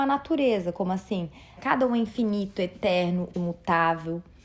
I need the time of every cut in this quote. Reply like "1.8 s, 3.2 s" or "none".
1.6 s, 3.3 s